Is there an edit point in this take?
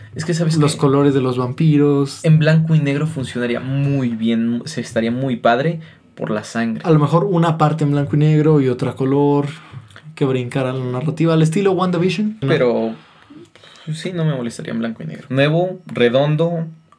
yes; 2 cuts; at 12.4 s, 15.3 s

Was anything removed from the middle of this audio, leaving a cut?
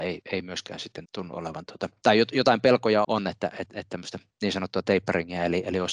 yes; 2 cuts; at 1.1 s, 3.0 s

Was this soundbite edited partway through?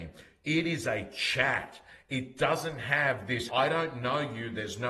yes; 1 cut; at 3.5 s

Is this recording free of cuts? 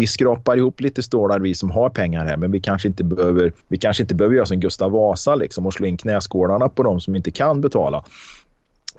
no; 1 cut; at 3.6 s

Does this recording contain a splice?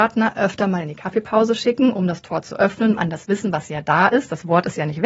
yes; 1 cut; at 3.0 s

